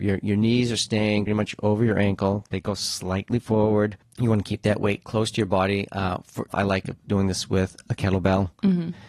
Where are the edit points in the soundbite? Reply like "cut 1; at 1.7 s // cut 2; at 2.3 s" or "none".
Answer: cut 1; at 1.3 s // cut 2; at 6.5 s